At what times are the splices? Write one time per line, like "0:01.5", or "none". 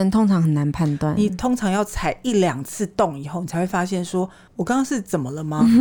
0:04.5